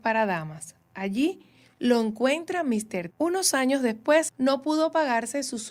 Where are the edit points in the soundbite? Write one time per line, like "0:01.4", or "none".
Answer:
0:03.1
0:04.3